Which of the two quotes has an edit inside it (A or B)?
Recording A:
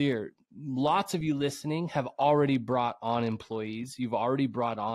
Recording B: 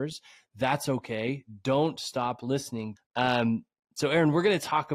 B